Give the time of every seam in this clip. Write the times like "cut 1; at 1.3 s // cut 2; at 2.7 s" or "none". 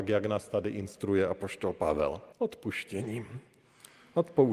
cut 1; at 2.3 s